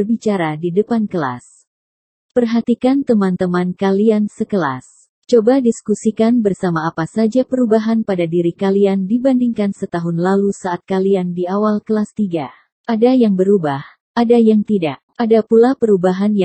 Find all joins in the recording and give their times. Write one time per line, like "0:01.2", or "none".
0:12.8
0:15.1